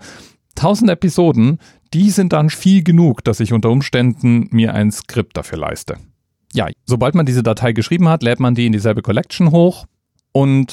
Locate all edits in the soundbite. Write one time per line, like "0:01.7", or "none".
0:02.5
0:06.7